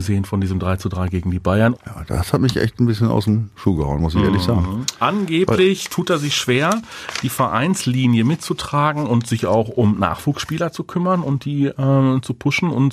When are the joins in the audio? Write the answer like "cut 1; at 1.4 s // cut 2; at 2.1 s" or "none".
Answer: cut 1; at 1.7 s